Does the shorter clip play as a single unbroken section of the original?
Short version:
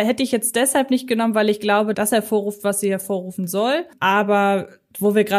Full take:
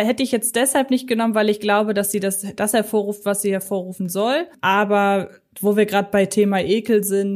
no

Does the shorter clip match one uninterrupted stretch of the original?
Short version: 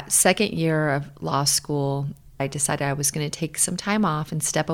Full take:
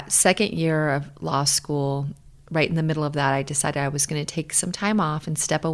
no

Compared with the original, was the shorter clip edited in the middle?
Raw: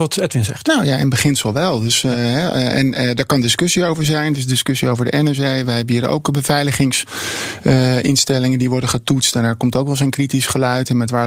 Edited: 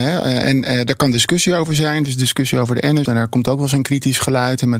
yes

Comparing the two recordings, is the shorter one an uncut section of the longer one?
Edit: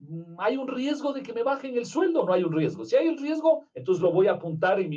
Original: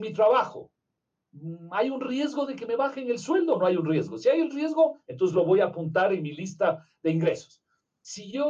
yes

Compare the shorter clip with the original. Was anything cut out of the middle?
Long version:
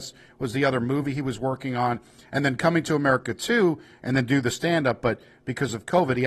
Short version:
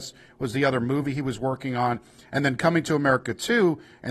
no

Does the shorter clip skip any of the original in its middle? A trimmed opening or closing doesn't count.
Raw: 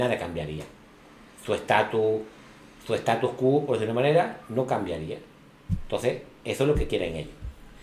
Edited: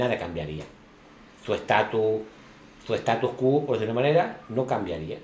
no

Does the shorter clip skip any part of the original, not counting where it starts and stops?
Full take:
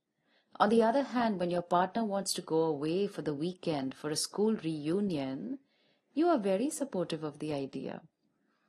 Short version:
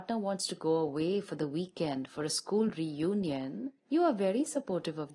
yes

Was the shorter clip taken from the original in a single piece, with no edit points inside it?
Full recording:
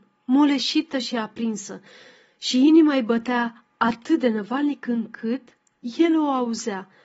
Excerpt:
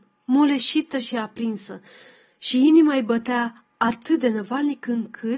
yes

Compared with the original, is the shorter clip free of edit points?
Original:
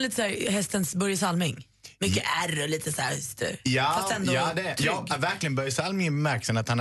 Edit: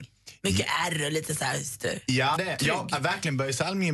no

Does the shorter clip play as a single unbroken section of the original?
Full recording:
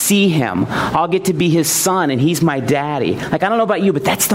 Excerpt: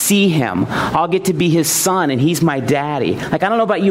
yes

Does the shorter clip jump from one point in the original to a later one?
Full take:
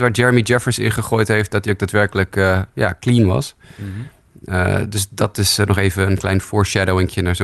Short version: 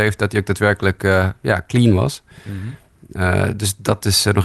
no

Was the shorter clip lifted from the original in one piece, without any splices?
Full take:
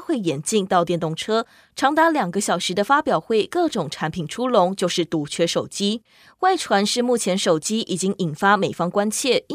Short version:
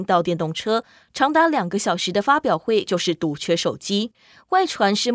no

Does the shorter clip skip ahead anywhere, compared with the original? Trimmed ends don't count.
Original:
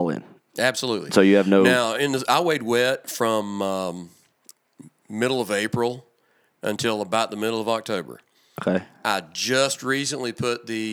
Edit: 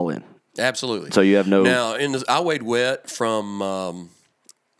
no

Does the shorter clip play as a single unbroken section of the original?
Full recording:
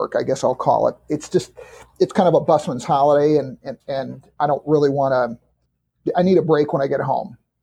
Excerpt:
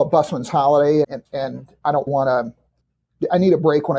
no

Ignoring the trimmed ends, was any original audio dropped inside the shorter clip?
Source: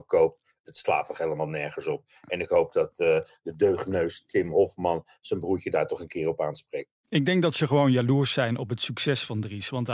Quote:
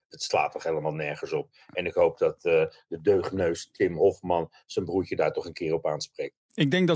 no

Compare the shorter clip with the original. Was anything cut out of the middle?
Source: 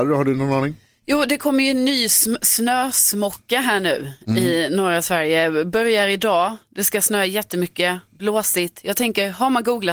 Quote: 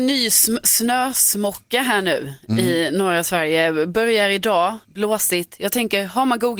yes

